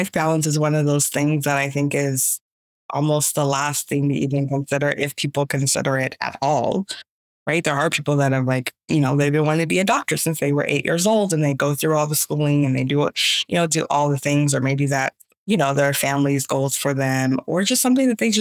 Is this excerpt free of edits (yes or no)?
yes